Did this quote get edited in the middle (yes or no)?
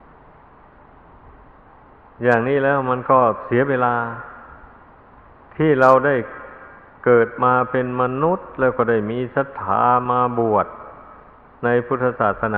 no